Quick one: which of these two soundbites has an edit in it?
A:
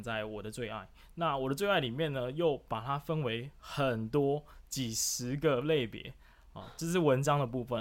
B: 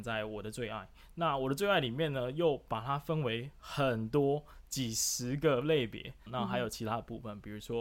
B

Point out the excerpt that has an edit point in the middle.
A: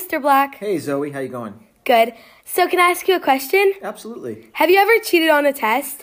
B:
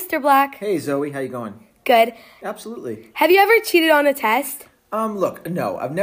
B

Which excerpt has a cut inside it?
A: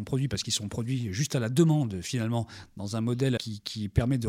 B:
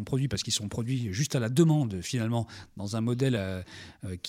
A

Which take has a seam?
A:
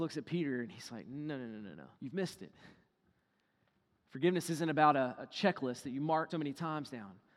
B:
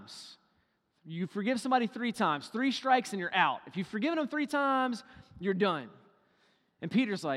A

